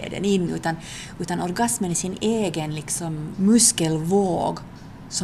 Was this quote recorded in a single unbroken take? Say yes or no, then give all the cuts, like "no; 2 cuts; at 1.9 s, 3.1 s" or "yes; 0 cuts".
no; 1 cut; at 3.3 s